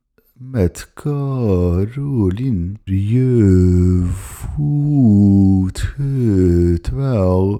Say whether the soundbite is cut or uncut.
cut